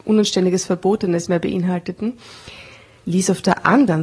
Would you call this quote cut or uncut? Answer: uncut